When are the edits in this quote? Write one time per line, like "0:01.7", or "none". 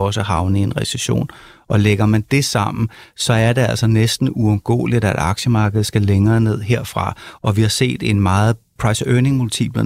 0:07.4
0:08.8